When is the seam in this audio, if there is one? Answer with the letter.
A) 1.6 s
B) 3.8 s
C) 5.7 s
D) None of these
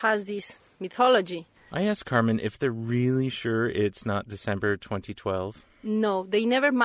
A